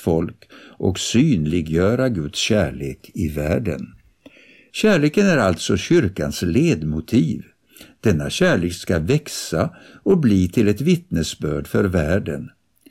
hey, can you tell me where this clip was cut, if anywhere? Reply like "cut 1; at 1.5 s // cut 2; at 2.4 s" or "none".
cut 1; at 4.7 s

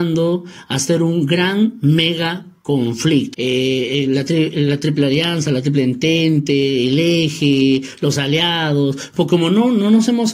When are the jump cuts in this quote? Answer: cut 1; at 3.3 s

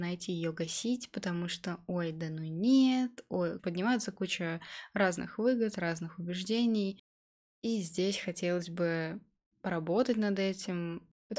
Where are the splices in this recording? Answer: cut 1; at 3.6 s

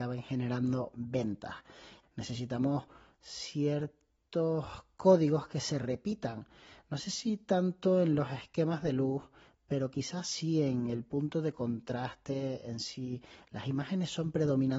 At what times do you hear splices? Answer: cut 1; at 2.0 s

